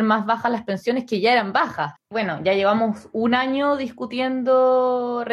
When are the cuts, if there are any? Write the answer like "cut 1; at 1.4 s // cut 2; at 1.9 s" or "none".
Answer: cut 1; at 2.0 s